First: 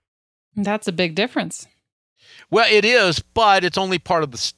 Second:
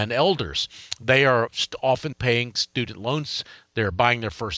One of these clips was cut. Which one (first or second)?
second